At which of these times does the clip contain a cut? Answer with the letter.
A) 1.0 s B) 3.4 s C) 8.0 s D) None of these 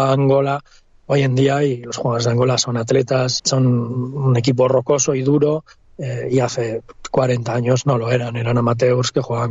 B